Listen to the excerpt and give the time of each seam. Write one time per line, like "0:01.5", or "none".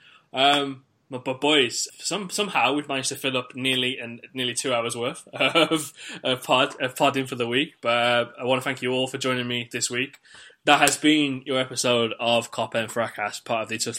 0:01.9

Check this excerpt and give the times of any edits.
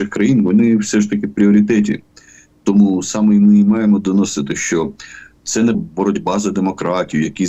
0:05.7

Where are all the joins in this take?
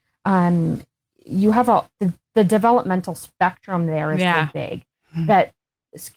0:02.0

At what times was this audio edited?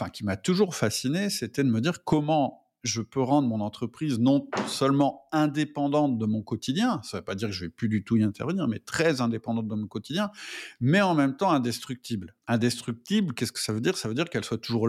0:12.4

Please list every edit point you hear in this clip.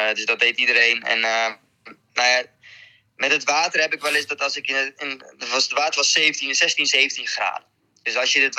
none

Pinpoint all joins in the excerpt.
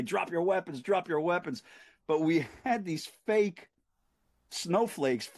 none

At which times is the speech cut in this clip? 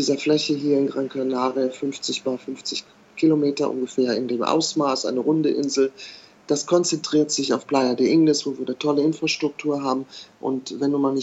0:10.3

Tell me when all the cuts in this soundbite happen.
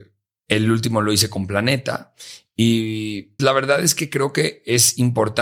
0:03.4

